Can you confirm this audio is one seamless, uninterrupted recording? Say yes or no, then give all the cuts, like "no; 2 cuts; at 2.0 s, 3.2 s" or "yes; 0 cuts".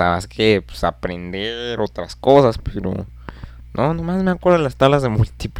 yes; 0 cuts